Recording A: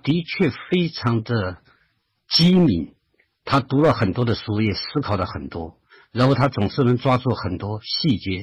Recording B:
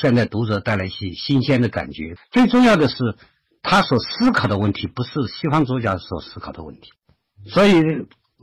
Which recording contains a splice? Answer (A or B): B